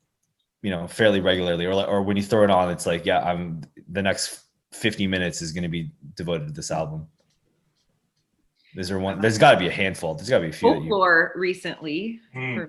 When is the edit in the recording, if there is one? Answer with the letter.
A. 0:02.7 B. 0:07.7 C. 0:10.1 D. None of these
D